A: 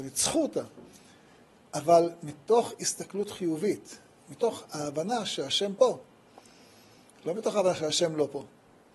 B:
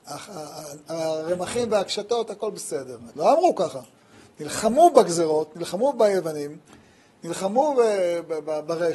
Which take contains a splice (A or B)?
B